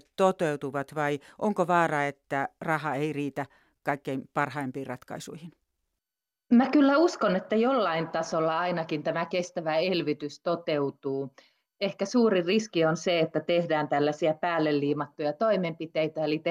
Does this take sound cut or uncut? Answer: uncut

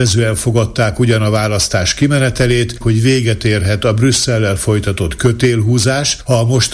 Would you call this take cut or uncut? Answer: cut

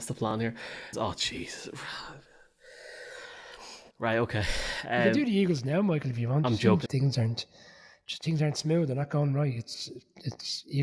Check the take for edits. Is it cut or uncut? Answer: cut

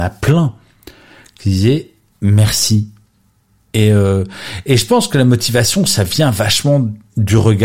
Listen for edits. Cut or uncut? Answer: uncut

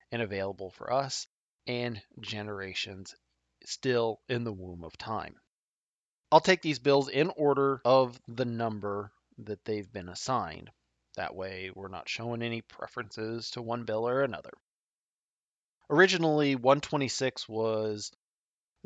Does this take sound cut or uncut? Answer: cut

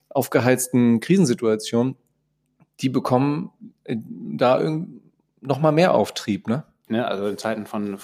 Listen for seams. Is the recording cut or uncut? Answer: cut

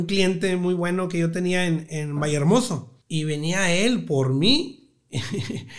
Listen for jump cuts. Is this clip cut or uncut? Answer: cut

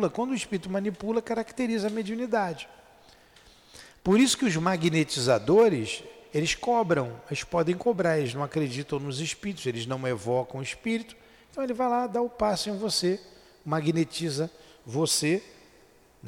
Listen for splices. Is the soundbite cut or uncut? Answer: uncut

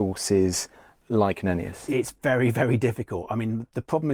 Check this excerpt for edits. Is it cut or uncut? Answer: uncut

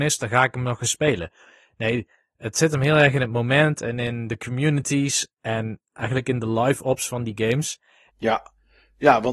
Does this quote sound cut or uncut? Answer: cut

